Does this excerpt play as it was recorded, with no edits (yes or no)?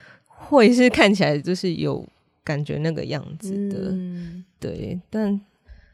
yes